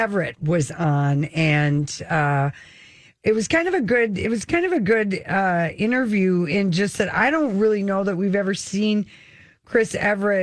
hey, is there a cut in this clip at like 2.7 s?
no; 0 cuts

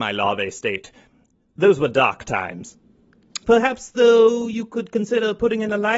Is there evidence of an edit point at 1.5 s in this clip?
no; 1 cut; at 3.4 s

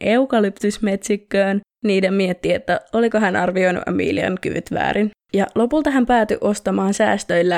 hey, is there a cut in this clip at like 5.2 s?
yes; 1 cut; at 5.2 s

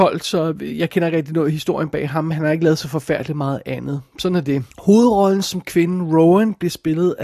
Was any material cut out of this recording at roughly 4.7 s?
yes; 1 cut; at 4.7 s

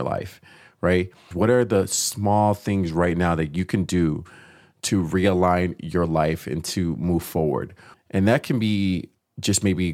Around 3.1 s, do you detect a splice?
no; 2 cuts; at 1.3 s, 7.9 s

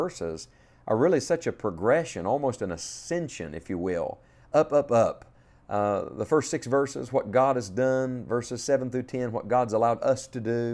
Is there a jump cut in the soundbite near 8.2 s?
no; 0 cuts

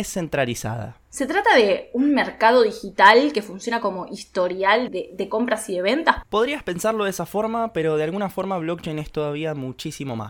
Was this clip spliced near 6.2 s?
yes; 3 cuts; at 1.1 s, 4.9 s, 6.2 s

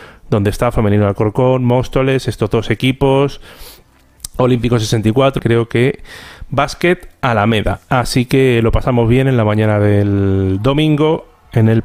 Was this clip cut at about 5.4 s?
yes; 1 cut; at 5.4 s

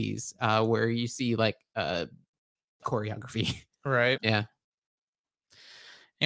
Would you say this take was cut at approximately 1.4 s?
no; 2 cuts; at 2.8 s, 4.2 s

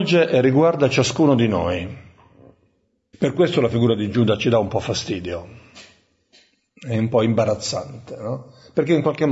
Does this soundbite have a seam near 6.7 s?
no; 1 cut; at 3.1 s

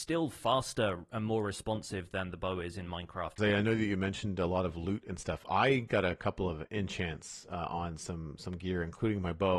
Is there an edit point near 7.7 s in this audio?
no; 1 cut; at 3.4 s

